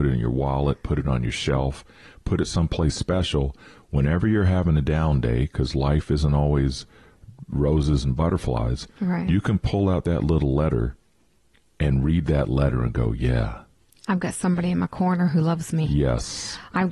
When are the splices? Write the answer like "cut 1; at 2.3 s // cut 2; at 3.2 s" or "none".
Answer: none